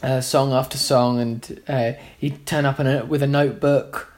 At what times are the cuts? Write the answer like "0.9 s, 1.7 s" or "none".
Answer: none